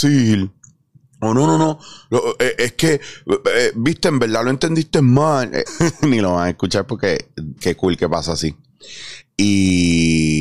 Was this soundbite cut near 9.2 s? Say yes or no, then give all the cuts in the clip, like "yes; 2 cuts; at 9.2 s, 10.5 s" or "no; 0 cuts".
yes; 3 cuts; at 5.7 s, 7.6 s, 9.2 s